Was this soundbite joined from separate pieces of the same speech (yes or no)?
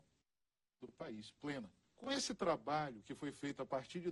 yes